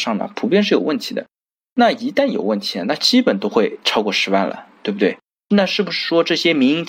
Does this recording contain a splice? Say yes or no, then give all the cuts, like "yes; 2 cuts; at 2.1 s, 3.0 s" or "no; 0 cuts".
no; 0 cuts